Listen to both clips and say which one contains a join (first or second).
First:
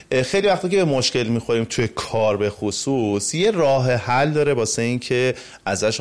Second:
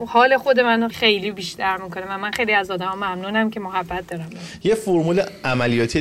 second